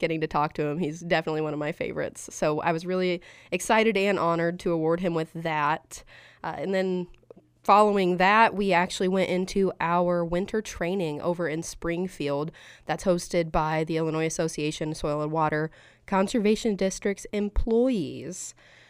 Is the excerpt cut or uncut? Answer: uncut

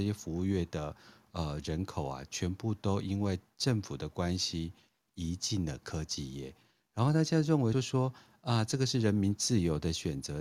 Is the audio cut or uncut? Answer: cut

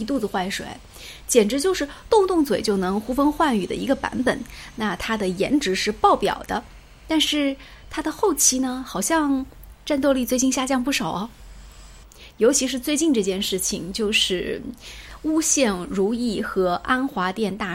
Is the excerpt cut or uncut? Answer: uncut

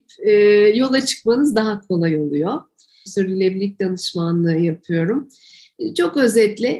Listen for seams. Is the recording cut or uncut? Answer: cut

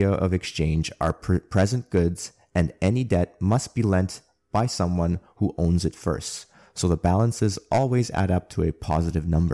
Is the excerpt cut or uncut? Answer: uncut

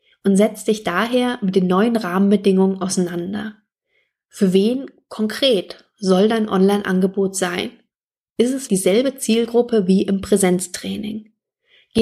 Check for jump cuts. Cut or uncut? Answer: cut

